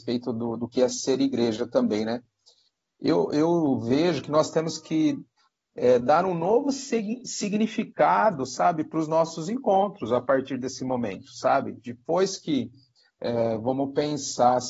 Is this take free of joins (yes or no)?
yes